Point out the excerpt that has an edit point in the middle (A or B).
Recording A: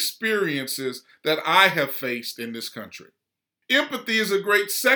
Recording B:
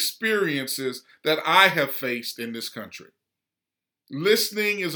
A